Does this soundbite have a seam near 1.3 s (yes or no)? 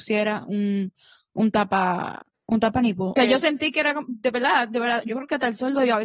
no